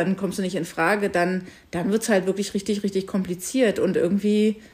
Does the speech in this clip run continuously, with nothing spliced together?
yes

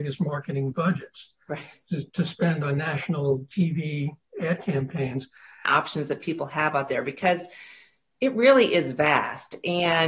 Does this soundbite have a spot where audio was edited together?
yes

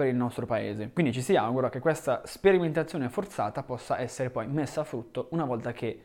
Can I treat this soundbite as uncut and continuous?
yes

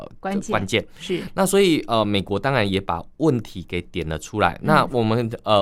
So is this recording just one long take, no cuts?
yes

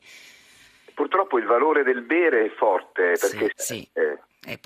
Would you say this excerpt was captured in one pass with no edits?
no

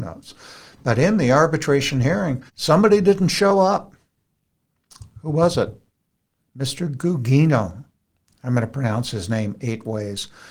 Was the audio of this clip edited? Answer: yes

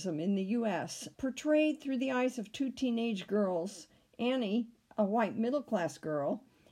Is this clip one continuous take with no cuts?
no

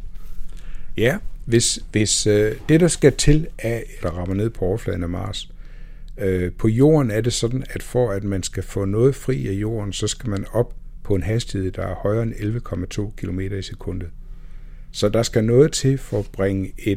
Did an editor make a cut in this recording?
yes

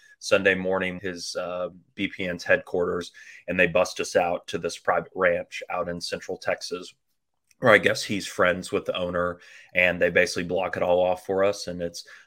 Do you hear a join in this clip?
yes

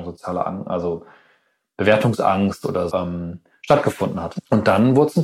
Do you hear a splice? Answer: yes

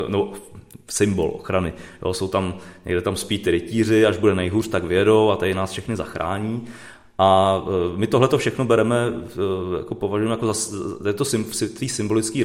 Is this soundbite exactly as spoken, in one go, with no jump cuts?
yes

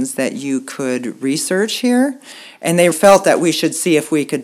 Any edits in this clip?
yes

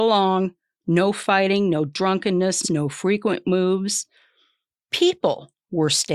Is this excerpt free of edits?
no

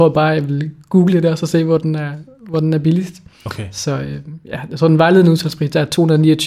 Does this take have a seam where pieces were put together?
no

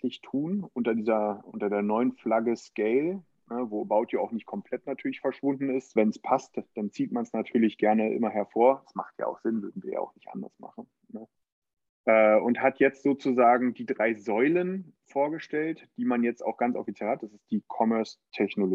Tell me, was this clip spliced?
yes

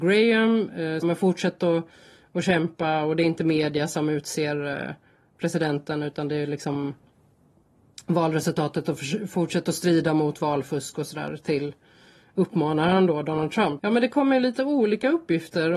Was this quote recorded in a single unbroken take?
no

